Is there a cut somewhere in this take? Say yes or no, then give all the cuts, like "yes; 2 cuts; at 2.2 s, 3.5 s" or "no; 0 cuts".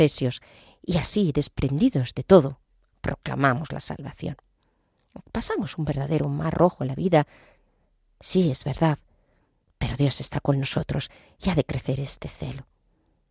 no; 0 cuts